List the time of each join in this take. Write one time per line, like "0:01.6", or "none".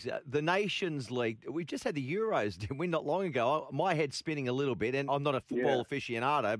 0:05.1